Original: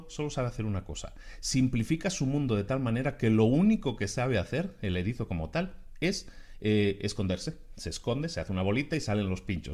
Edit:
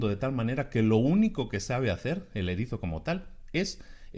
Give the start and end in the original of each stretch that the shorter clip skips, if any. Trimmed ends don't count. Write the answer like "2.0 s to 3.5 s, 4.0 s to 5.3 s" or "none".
none